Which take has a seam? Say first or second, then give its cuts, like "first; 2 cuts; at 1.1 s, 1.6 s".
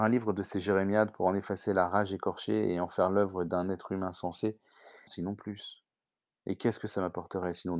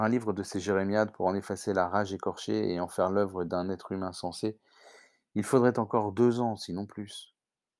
first; 1 cut; at 5.1 s